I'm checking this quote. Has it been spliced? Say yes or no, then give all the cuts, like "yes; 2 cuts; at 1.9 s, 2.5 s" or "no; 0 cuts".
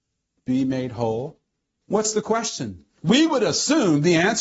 yes; 2 cuts; at 1.8 s, 3.0 s